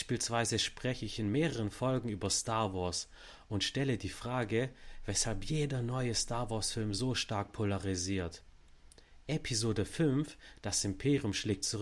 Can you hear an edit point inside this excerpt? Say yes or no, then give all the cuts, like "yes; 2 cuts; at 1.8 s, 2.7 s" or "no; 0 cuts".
no; 0 cuts